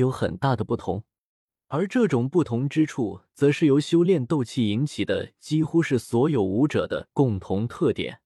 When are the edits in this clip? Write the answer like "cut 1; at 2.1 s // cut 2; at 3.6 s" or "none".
none